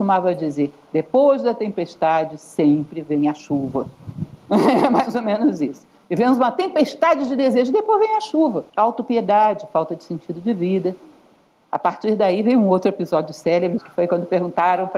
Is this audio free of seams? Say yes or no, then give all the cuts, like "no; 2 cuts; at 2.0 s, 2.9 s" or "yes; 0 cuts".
no; 2 cuts; at 8.7 s, 13.8 s